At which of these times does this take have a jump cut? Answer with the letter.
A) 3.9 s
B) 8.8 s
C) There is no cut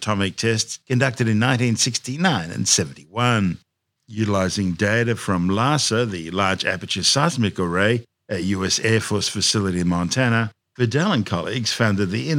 A